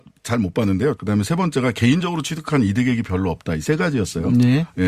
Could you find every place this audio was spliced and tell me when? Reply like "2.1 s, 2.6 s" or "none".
1.0 s